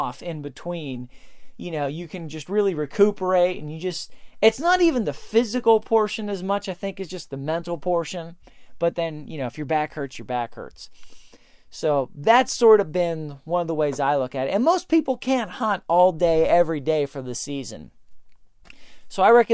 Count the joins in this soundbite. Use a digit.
0